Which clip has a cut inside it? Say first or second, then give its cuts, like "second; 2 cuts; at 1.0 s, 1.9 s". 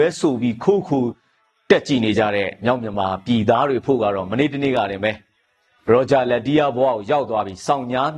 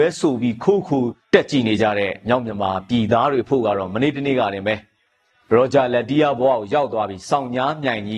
second; 1 cut; at 1.2 s